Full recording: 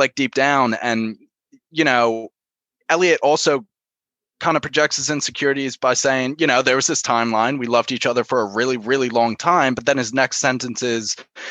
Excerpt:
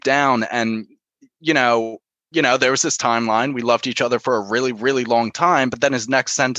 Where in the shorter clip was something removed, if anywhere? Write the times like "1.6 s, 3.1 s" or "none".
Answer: 2.3 s